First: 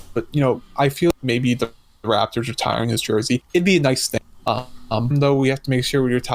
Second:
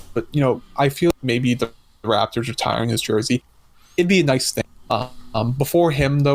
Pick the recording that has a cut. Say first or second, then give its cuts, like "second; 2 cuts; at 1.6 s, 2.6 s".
first; 2 cuts; at 3.5 s, 5.1 s